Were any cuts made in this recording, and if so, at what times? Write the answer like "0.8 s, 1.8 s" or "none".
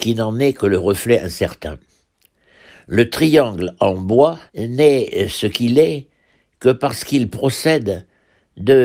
4.5 s